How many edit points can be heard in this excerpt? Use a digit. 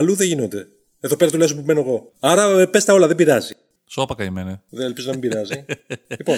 2